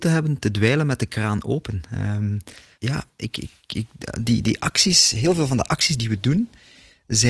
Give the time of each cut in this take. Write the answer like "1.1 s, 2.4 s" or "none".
2.7 s